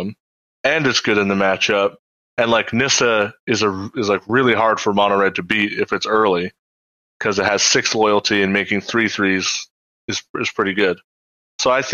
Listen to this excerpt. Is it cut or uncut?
uncut